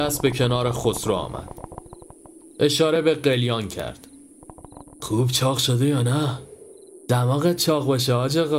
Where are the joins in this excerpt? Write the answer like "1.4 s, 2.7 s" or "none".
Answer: 7.0 s